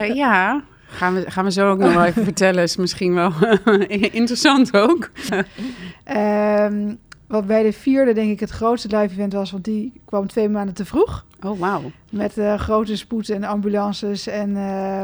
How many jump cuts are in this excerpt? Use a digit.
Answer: 1